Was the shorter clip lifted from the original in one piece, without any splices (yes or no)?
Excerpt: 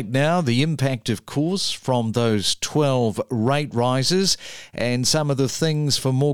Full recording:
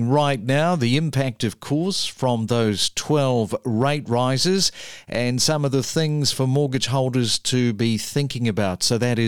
yes